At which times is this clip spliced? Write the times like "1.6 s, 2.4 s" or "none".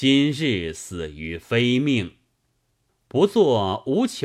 2.9 s